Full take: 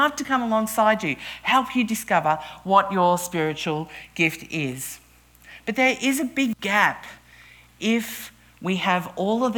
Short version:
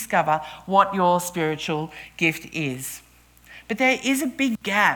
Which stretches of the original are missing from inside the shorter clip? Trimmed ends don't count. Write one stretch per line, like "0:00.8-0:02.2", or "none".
none